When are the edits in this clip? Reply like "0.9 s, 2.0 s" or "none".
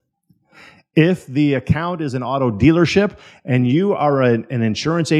none

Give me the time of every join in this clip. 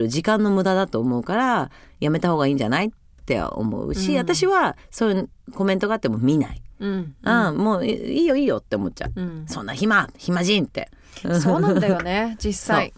none

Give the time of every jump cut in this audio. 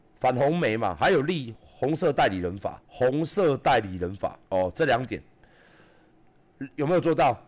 2.8 s, 4.4 s

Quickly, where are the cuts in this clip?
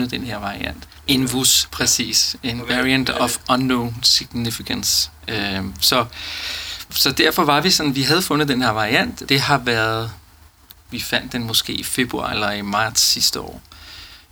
6.9 s, 9.3 s, 10.7 s

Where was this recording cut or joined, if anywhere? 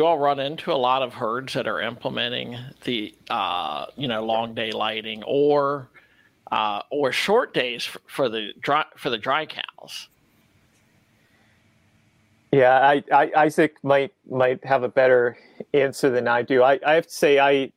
none

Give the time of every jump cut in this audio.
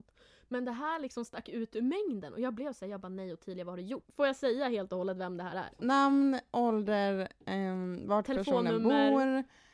4.1 s, 5.8 s

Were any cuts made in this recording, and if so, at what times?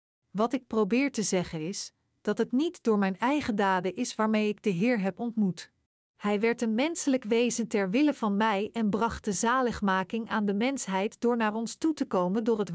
6.0 s

